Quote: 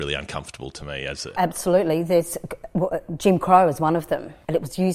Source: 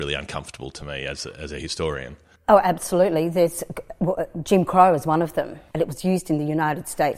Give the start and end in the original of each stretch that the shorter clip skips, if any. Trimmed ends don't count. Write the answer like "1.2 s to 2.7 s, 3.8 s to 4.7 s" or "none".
1.4 s to 2.6 s